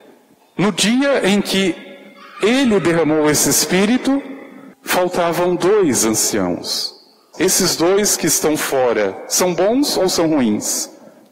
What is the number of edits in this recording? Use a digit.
2